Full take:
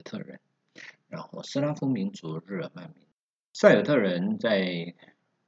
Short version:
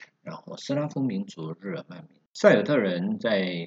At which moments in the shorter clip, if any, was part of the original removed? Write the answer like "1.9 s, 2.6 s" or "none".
2.3 s